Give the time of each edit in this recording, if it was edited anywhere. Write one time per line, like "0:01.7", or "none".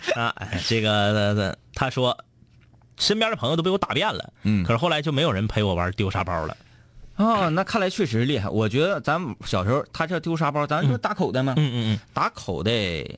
none